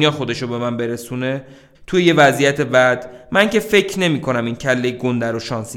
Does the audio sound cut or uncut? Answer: cut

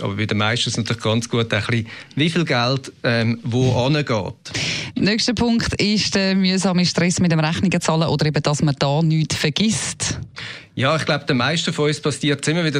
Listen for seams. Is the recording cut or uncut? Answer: cut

